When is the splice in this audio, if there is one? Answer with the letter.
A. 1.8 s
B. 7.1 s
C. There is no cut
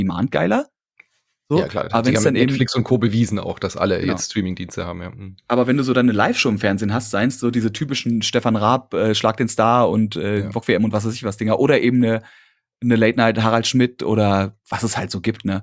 C